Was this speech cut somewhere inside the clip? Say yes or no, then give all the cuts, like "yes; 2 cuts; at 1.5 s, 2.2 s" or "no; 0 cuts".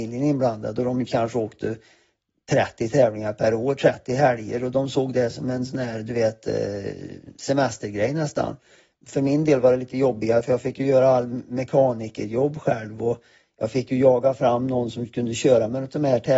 no; 0 cuts